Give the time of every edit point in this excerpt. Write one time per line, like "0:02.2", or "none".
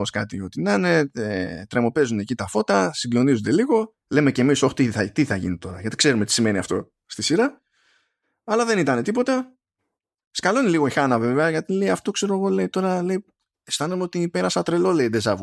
none